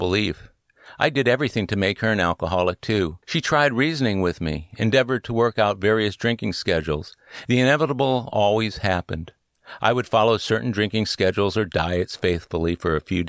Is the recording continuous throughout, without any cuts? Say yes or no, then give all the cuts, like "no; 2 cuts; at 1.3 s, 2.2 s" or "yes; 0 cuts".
no; 2 cuts; at 3.2 s, 7.5 s